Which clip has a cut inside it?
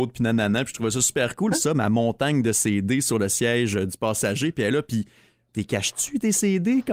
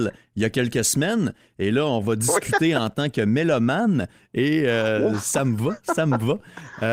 first; 1 cut; at 1.5 s

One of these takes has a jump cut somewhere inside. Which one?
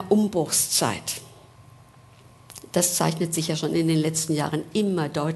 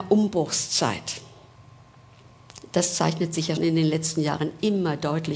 second; 1 cut; at 3.6 s

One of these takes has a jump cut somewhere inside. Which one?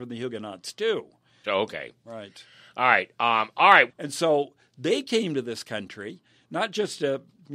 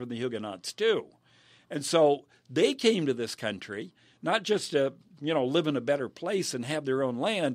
first; 2 cuts; at 1.4 s, 3.9 s

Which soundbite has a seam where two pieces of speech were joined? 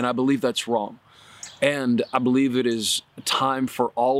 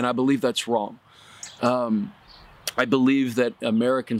second; 1 cut; at 1.6 s

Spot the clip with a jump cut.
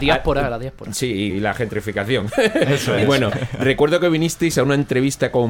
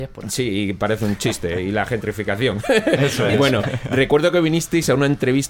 first; 1 cut; at 1.3 s

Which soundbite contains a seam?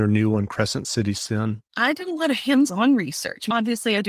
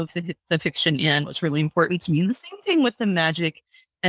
first; 1 cut; at 1.7 s

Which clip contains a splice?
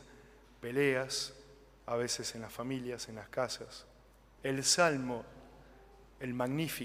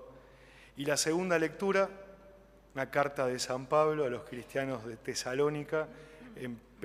first; 1 cut; at 4.4 s

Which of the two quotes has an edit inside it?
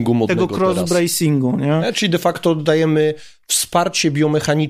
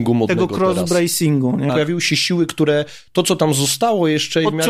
second; 1 cut; at 1.7 s

